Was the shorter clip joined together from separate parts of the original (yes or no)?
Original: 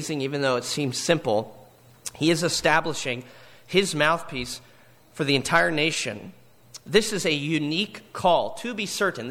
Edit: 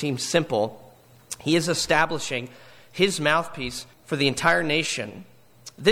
yes